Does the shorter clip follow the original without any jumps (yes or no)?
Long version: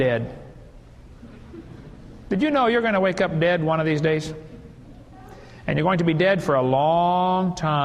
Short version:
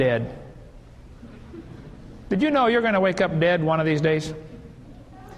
yes